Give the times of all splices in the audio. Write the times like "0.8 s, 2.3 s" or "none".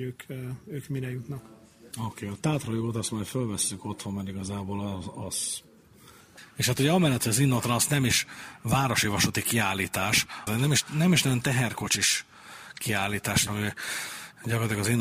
1.9 s, 10.5 s, 13.5 s